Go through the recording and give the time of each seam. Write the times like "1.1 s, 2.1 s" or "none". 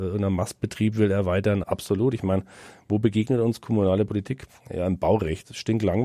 1.6 s